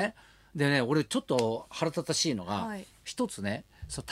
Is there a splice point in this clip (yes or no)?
no